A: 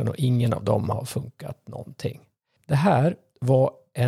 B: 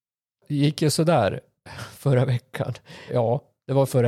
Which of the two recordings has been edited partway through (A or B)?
B